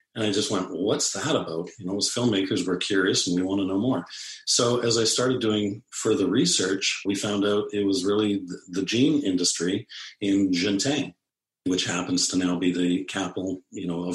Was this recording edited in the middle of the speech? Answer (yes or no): no